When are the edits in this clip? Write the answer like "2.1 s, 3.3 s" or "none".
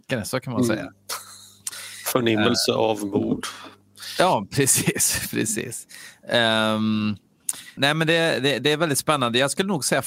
7.8 s

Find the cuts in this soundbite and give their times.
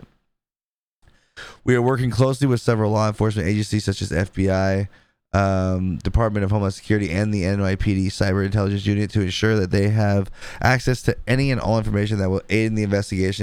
none

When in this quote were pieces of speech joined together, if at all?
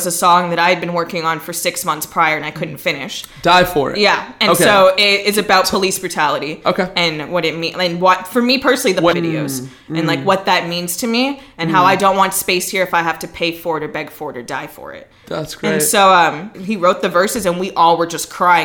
9.1 s, 16.5 s

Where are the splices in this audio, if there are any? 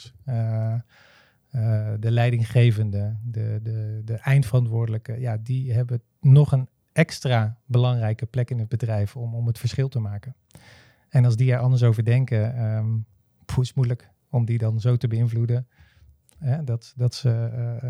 none

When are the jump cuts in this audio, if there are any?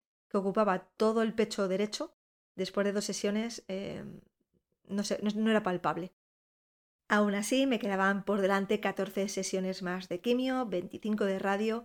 none

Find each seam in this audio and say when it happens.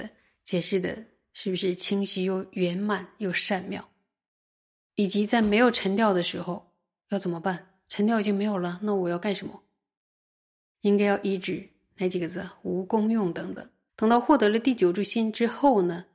4.8 s, 13.9 s

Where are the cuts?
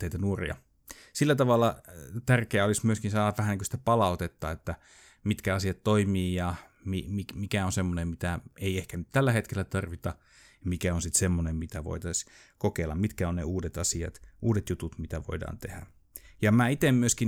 none

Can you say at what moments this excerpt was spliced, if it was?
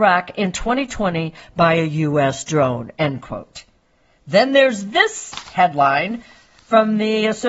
none

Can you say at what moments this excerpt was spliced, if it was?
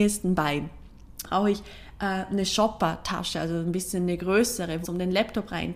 1.2 s, 4.8 s

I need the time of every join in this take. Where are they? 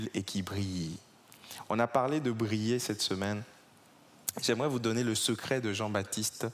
none

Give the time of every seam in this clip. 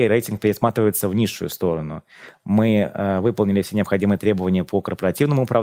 2.3 s

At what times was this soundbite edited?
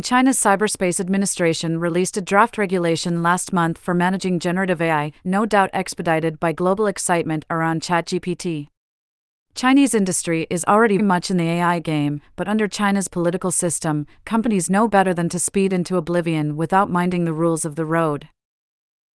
11.0 s

